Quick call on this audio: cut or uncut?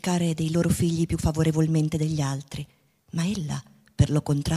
uncut